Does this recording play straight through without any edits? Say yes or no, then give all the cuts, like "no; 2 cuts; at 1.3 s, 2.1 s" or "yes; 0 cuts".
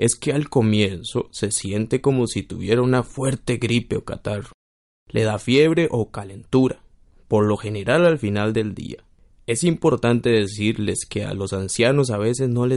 yes; 0 cuts